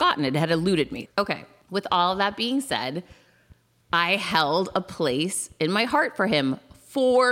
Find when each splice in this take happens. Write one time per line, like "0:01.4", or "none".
0:01.1